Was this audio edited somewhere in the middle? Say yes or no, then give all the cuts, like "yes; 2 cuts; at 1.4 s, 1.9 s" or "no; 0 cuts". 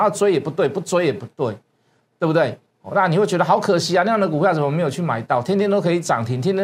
no; 0 cuts